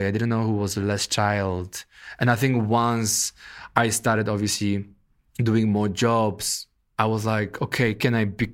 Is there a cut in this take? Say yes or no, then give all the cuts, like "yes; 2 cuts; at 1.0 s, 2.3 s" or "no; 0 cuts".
no; 0 cuts